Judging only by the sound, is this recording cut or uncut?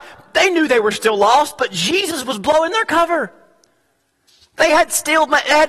uncut